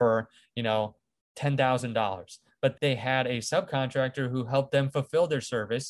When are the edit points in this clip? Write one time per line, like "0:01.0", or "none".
0:02.7